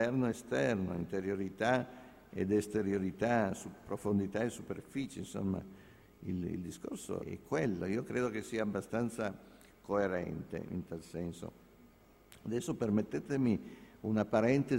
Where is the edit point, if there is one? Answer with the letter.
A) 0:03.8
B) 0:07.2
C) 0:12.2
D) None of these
B